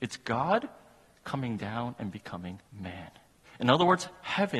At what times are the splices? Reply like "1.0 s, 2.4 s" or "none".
2.7 s